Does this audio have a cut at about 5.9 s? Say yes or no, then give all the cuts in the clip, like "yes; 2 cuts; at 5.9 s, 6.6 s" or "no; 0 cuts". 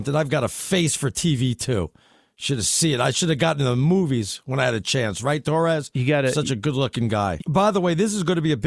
no; 1 cut; at 7.4 s